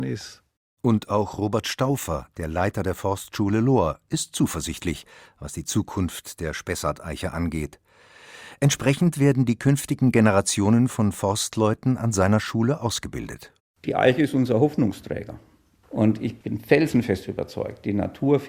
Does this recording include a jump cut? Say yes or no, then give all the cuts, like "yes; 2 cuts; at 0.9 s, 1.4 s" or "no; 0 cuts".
yes; 1 cut; at 15.8 s